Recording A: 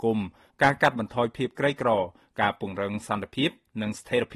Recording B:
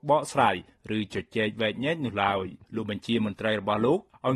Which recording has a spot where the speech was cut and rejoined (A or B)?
B